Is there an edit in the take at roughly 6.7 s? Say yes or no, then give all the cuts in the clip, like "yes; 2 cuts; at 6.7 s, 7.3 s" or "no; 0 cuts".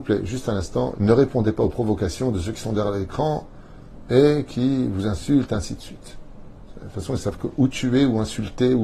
no; 1 cut; at 1.0 s